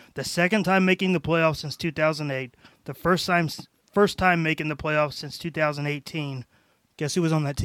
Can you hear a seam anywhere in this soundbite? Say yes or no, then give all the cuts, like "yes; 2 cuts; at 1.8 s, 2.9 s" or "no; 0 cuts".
no; 0 cuts